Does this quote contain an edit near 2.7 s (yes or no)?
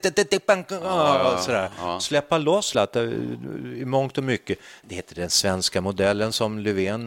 yes